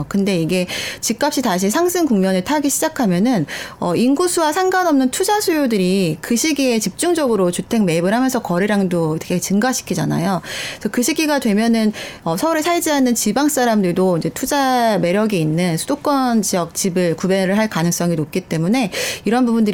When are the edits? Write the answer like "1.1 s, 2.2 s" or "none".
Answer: none